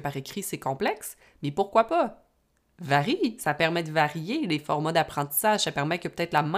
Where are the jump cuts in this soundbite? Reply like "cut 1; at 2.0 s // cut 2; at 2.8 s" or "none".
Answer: none